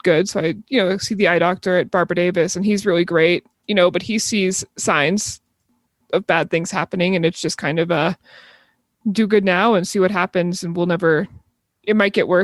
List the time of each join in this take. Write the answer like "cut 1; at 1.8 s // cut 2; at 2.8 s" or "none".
cut 1; at 3.5 s